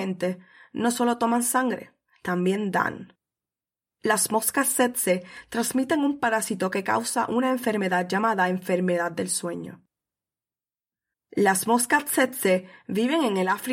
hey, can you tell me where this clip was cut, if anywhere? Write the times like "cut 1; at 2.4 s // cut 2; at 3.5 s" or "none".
cut 1; at 11.1 s